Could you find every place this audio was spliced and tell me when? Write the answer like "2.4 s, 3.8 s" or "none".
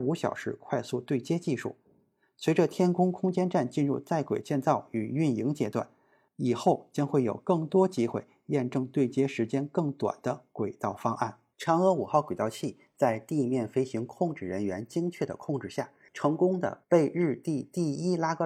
11.5 s, 16.1 s